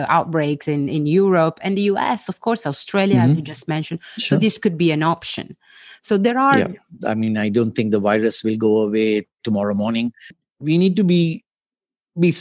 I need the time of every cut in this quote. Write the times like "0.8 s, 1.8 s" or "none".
7.0 s

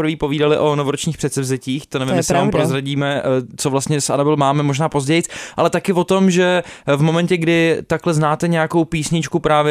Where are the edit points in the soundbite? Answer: 3.6 s

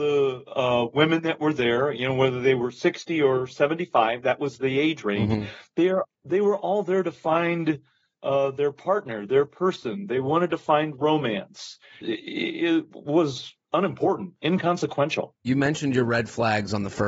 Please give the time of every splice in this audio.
12.0 s

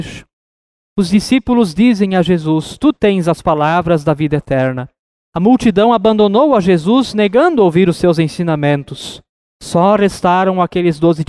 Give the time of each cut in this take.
none

